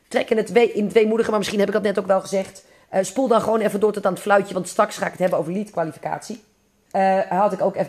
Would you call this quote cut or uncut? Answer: cut